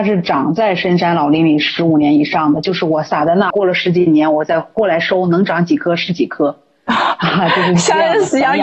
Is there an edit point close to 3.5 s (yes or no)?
yes